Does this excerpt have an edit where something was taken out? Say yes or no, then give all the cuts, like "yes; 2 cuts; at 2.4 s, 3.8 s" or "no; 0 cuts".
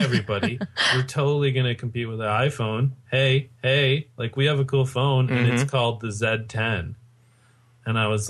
no; 0 cuts